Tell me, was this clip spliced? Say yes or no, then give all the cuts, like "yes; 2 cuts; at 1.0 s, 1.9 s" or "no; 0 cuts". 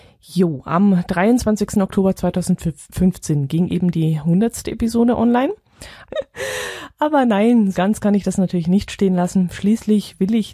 yes; 2 cuts; at 6.0 s, 7.7 s